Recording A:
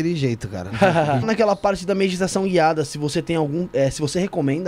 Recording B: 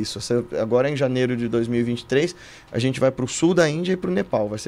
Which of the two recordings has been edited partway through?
A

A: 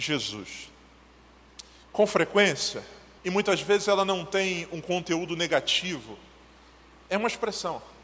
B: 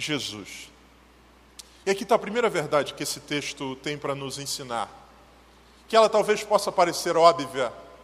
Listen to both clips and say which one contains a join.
A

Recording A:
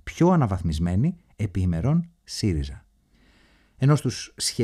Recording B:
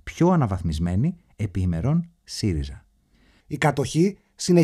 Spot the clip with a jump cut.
B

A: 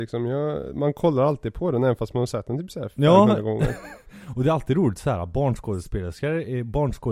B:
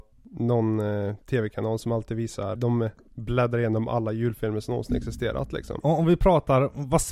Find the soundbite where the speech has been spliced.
B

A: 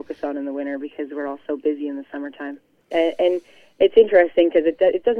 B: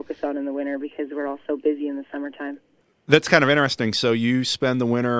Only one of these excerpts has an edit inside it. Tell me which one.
A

